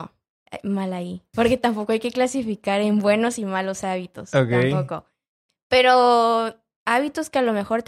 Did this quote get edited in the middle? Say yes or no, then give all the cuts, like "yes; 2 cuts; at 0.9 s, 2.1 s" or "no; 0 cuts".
no; 0 cuts